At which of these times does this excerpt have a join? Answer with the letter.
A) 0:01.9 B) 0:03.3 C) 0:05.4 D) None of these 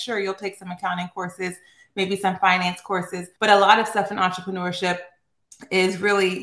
B